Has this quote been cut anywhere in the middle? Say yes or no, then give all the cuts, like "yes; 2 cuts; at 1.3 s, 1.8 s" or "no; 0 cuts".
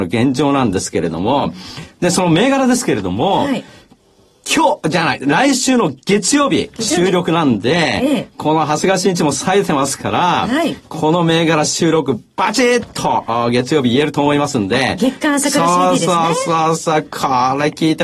no; 0 cuts